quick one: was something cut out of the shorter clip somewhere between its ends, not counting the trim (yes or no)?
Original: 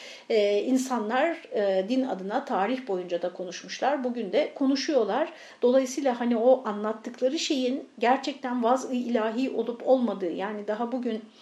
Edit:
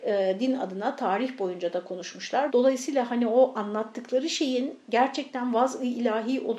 yes